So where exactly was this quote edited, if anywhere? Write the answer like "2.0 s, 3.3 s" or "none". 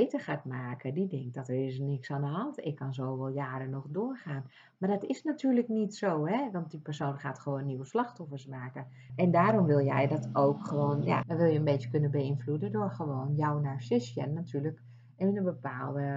9.1 s, 11.2 s